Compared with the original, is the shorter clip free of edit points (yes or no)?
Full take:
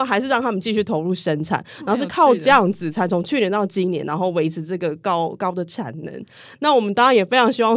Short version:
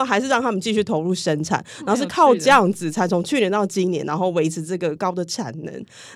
no